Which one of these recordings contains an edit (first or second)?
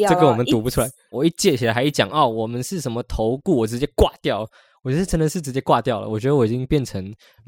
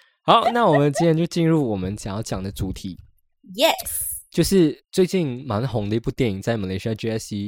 first